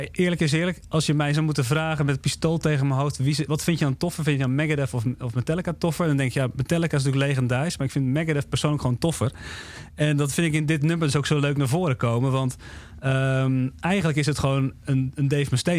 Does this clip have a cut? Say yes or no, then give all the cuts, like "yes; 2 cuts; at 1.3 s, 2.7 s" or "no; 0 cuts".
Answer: yes; 1 cut; at 3.5 s